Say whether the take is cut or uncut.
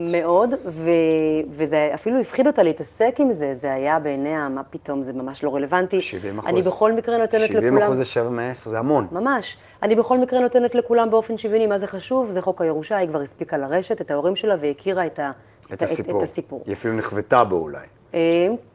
uncut